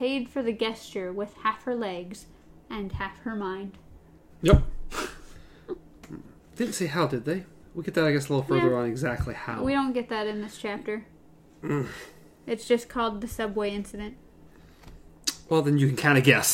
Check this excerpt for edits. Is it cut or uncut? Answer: cut